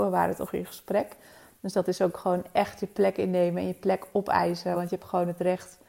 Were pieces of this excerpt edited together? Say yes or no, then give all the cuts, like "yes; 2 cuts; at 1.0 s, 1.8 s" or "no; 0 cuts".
no; 0 cuts